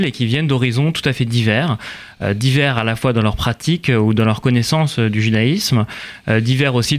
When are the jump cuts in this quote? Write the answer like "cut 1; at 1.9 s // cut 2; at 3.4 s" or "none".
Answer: none

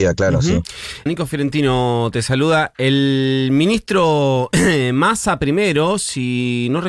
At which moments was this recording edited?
cut 1; at 1.1 s

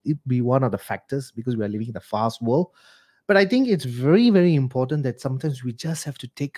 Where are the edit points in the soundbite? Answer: none

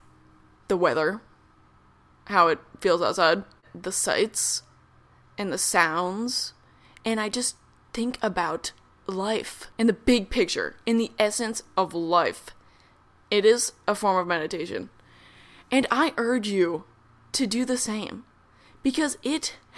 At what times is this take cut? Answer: cut 1; at 9.7 s

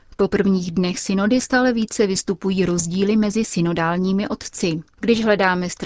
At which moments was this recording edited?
cut 1; at 4.9 s

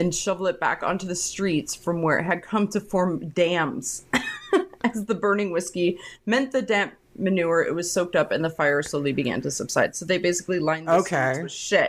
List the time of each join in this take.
none

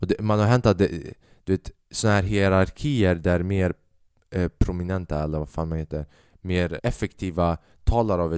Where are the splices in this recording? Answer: cut 1; at 6.8 s

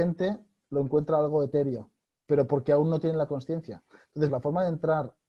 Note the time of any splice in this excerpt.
cut 1; at 2.2 s // cut 2; at 4.3 s

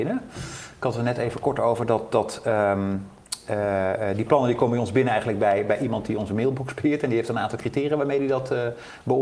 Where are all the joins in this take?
none

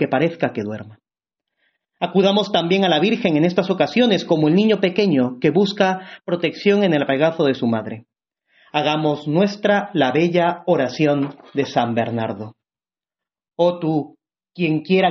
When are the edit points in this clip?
none

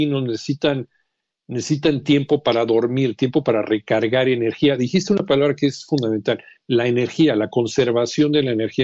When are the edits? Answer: none

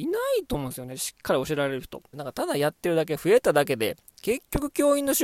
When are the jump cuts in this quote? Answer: cut 1; at 2.1 s

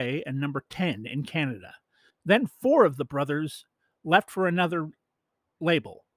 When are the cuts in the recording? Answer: cut 1; at 2.1 s

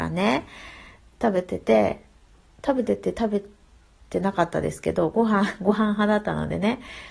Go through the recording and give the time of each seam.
none

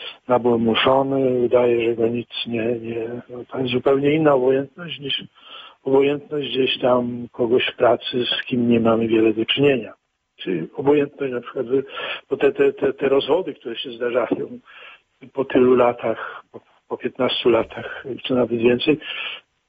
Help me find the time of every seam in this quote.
cut 1; at 18.2 s

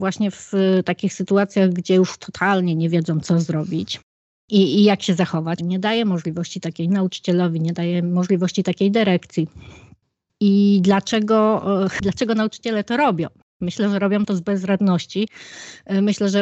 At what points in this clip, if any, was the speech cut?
cut 1; at 5.6 s

